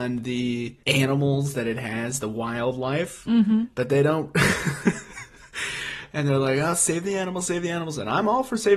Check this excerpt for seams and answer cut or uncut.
uncut